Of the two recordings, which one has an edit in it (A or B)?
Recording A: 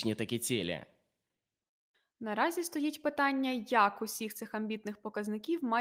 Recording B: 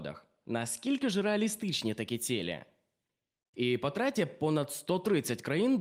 B